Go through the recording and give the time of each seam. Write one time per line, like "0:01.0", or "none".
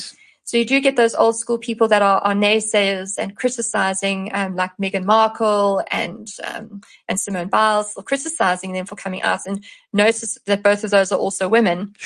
none